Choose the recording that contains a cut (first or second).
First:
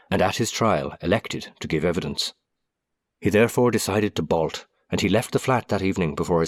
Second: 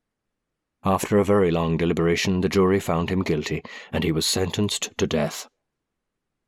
first